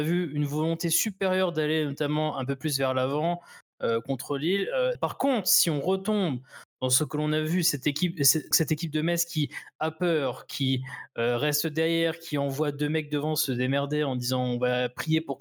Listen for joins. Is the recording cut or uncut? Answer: cut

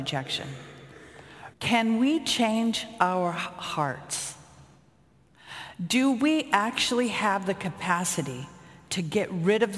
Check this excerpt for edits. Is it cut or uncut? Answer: cut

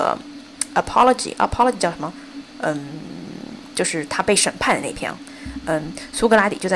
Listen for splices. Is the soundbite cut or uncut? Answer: uncut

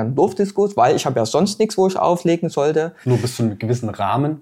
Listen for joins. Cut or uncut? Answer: cut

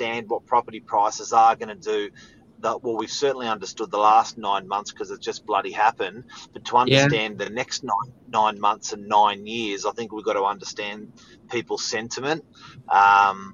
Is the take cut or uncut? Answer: uncut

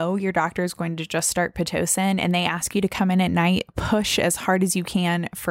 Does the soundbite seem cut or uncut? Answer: uncut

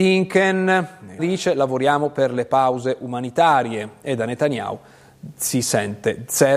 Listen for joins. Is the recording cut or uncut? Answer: cut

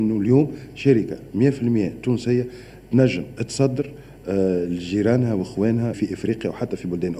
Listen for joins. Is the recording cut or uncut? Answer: cut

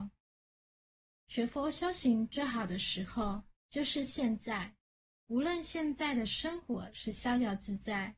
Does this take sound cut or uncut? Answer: uncut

